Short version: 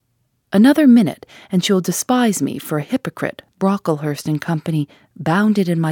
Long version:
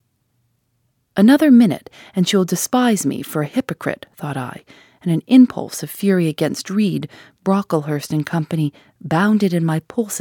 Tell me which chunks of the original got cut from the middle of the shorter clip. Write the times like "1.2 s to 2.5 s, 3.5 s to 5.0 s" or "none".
4.1 s to 7.3 s